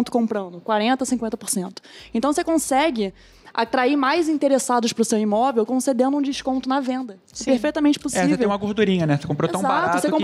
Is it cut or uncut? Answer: uncut